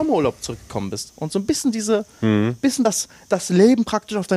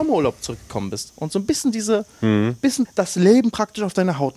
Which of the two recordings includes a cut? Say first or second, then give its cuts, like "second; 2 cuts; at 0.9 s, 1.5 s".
second; 1 cut; at 2.8 s